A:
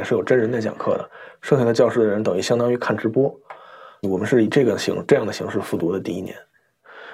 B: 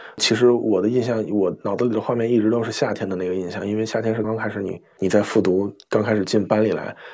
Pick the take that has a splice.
B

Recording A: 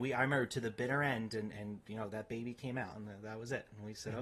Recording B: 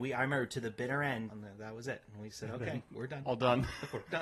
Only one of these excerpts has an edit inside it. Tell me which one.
B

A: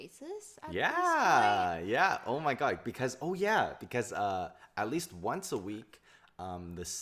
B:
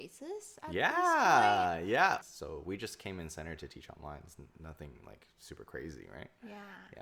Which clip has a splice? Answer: B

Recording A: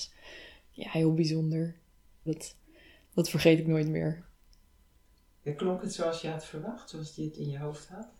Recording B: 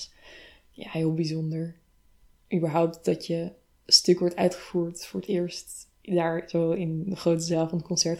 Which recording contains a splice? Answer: A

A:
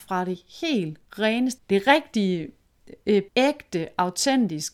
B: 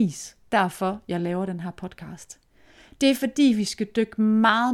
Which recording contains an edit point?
A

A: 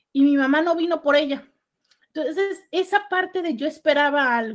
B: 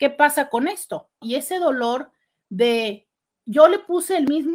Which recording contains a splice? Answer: B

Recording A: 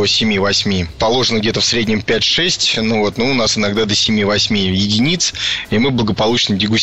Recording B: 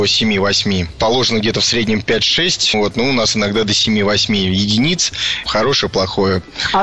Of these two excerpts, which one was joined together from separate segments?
B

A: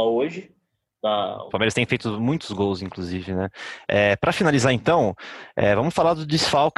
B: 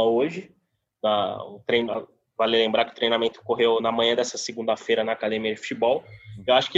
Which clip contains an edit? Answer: A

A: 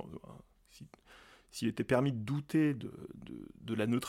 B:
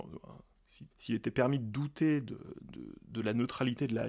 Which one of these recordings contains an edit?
B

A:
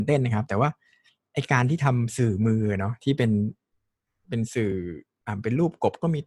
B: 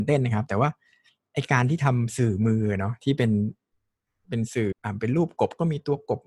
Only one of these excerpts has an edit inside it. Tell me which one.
B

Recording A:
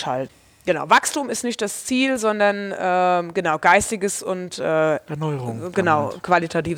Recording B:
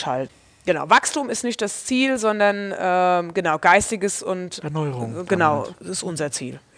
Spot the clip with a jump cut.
B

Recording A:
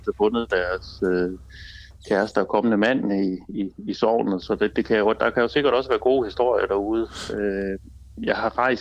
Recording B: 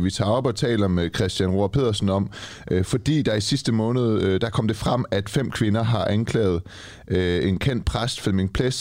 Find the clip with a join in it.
A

